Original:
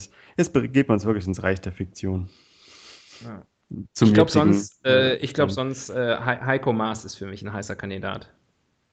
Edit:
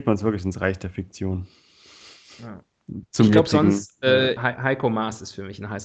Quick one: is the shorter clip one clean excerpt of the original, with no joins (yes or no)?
no